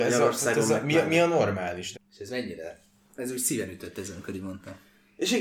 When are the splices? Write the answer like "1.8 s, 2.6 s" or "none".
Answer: 1.9 s